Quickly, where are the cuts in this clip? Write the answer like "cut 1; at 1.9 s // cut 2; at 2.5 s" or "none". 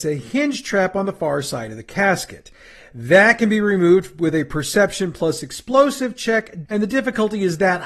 cut 1; at 6.7 s